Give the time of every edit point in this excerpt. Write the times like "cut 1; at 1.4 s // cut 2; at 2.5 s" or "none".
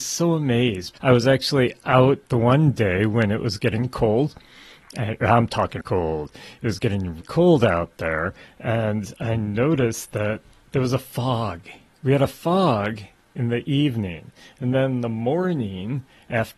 cut 1; at 0.9 s // cut 2; at 5.8 s // cut 3; at 7.2 s